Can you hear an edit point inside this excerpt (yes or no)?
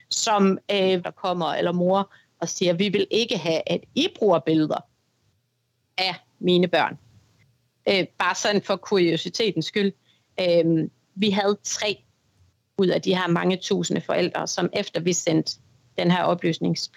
yes